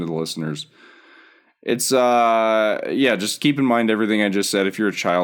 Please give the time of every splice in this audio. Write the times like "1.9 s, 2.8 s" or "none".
3.4 s